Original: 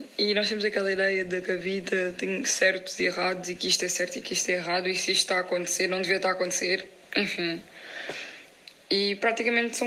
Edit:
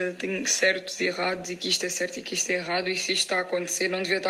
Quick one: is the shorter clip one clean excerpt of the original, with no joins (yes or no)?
yes